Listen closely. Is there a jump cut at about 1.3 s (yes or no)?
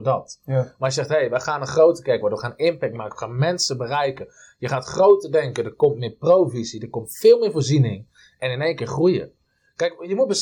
no